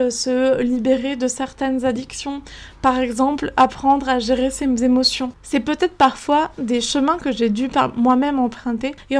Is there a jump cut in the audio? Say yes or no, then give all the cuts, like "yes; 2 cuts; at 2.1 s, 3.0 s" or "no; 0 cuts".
no; 0 cuts